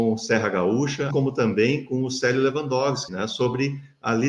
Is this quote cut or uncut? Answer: cut